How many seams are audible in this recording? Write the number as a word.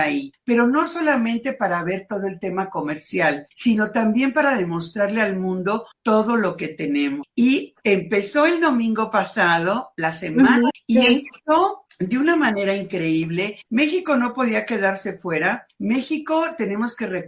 three